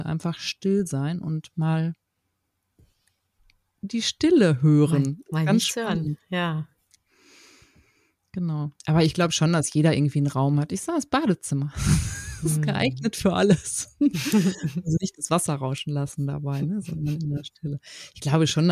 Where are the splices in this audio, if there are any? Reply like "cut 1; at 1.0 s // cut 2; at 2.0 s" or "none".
none

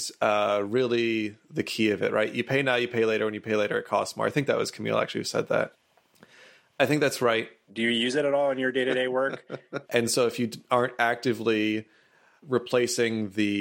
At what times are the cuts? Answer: cut 1; at 7.7 s // cut 2; at 9.8 s

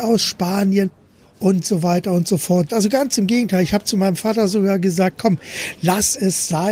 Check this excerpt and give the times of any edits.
cut 1; at 2.7 s

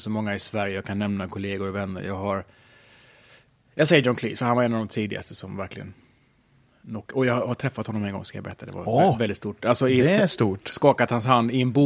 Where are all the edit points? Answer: none

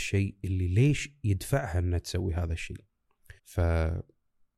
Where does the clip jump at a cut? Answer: cut 1; at 3.4 s

